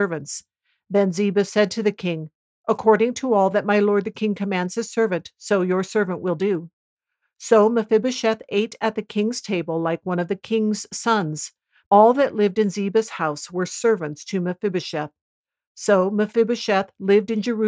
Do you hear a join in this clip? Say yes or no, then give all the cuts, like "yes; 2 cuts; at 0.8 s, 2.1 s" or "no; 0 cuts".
yes; 1 cut; at 11.8 s